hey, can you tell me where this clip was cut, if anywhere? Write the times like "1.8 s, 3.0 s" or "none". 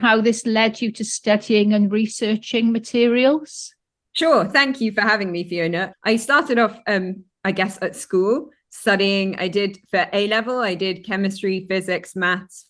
5.9 s

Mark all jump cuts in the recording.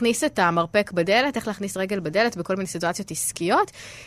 none

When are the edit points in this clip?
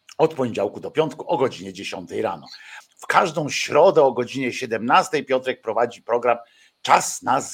2.8 s

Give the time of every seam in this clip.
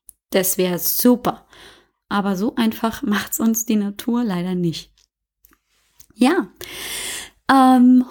none

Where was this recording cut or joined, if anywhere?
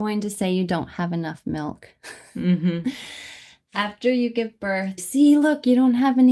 5.0 s

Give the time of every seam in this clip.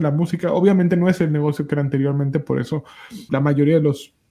3.3 s

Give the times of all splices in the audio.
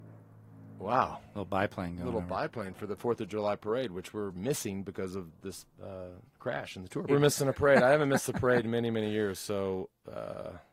7.1 s

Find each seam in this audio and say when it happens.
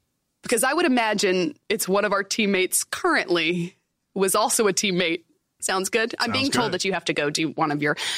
1.6 s, 5.6 s

